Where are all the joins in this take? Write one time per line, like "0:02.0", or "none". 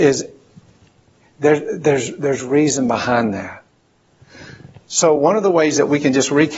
none